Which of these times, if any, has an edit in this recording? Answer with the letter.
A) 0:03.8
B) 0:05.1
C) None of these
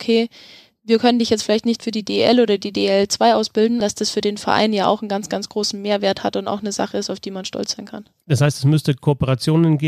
A